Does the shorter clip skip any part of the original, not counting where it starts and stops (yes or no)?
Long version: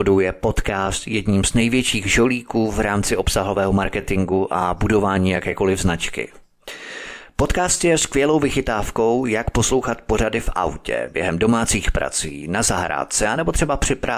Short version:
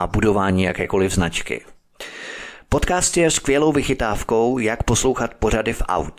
no